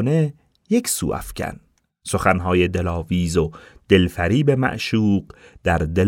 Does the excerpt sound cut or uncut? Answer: uncut